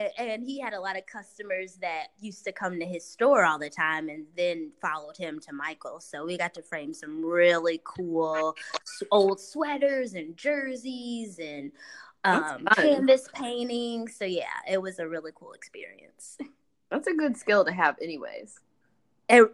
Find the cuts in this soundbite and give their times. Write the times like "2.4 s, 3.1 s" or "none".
none